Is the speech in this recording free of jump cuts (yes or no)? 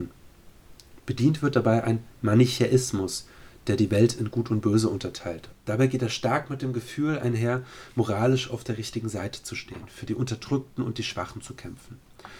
no